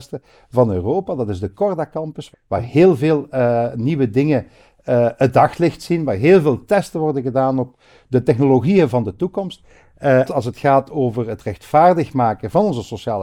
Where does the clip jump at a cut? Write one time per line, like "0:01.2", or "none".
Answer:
0:02.3
0:10.3